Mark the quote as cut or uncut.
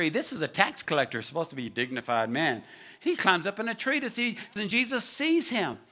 cut